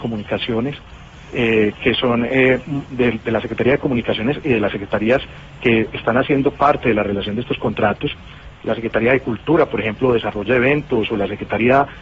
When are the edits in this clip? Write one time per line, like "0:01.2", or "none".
none

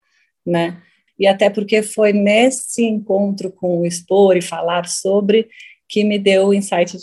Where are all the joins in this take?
0:01.1

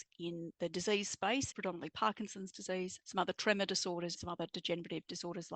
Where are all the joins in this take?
0:01.5
0:03.0
0:04.1

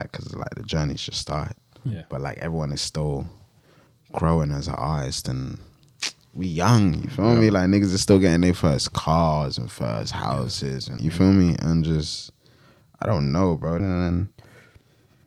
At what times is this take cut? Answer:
0:11.0
0:13.8

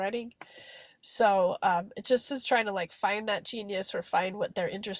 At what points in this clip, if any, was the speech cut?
none

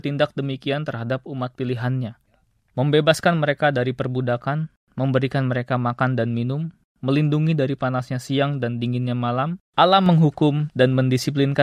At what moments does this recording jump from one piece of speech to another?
0:09.7

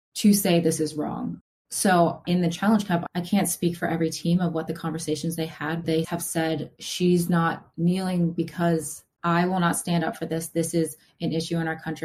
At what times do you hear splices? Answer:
0:05.8
0:09.2

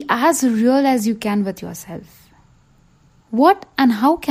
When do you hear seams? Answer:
0:03.2

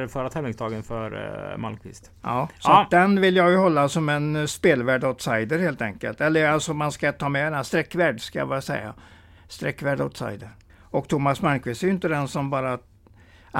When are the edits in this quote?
0:10.7

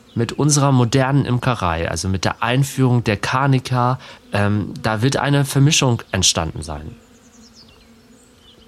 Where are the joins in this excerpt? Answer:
0:04.2

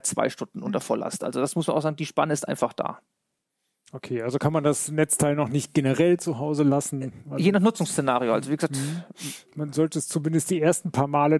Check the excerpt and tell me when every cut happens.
none

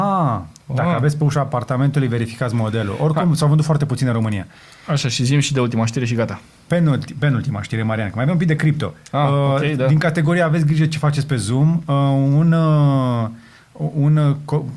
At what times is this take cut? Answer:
none

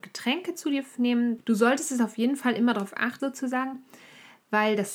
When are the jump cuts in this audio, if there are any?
0:01.4
0:03.2

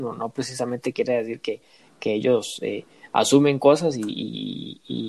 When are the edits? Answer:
none

